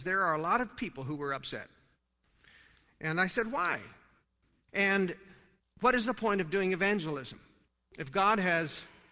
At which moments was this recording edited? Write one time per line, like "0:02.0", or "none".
0:04.7